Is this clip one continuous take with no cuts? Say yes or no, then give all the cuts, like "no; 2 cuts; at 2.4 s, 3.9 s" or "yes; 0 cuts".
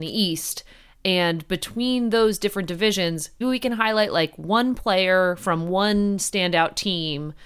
no; 1 cut; at 3.4 s